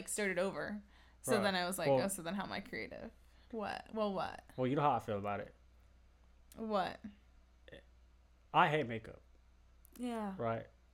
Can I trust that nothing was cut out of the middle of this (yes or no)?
yes